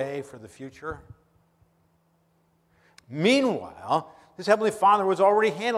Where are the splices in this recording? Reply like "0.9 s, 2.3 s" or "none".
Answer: 3.0 s